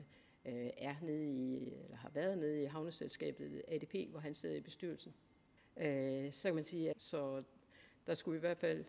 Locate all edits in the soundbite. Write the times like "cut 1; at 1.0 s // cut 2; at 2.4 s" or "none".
cut 1; at 5.6 s // cut 2; at 6.9 s